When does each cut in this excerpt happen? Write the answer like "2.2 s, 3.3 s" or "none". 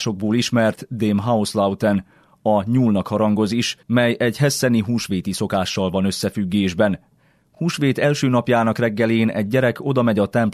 3.8 s